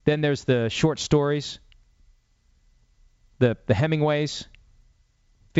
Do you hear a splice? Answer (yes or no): no